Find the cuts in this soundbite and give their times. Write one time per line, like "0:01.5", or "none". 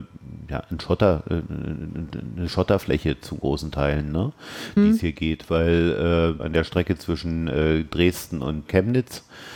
0:04.8
0:06.4
0:08.7